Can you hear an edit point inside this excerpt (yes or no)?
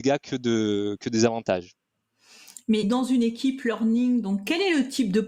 yes